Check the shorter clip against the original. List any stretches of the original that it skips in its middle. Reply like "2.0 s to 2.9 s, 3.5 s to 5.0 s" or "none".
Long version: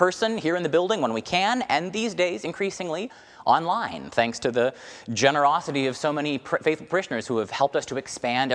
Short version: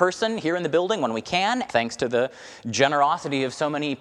1.7 s to 4.1 s